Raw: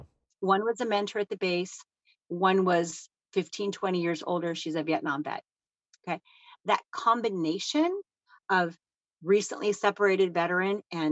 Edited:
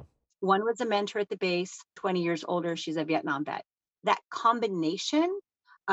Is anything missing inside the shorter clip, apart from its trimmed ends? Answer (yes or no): yes